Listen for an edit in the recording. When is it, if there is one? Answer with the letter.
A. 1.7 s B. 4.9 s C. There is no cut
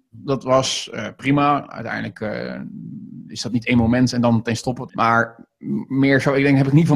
B